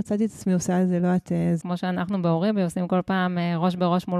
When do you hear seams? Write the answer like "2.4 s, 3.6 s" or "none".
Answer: 1.6 s